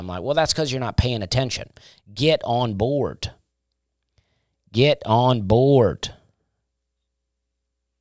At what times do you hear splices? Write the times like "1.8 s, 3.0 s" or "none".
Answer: none